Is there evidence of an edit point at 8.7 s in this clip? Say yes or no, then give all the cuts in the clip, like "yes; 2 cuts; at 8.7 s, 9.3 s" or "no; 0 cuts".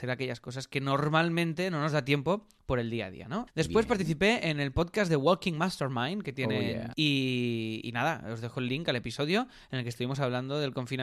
no; 2 cuts; at 3.5 s, 6.9 s